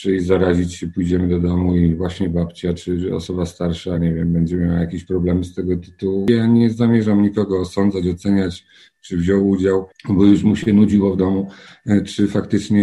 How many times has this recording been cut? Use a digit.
0